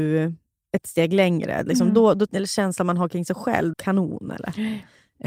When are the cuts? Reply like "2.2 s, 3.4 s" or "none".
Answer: 2.3 s, 3.7 s